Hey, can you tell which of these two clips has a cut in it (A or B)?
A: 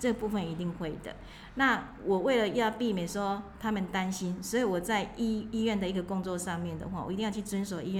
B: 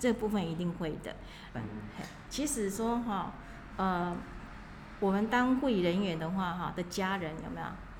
B